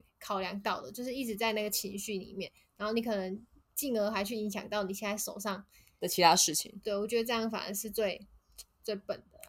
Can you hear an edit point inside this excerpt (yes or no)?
no